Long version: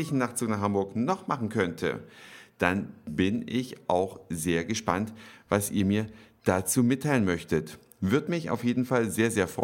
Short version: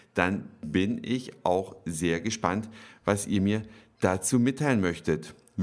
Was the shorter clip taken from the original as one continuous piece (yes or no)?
yes